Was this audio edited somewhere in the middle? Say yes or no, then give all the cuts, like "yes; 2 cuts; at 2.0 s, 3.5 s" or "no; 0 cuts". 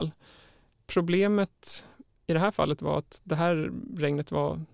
no; 0 cuts